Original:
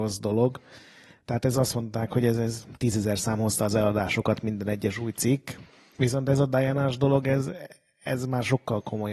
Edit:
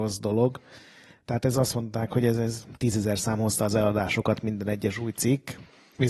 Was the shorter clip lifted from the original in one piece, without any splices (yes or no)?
yes